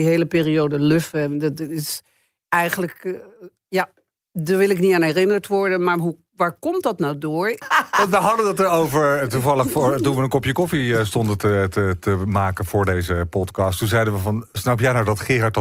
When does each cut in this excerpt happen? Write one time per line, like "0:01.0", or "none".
0:07.6